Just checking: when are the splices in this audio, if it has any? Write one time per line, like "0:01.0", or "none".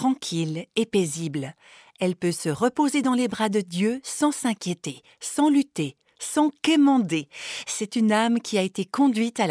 none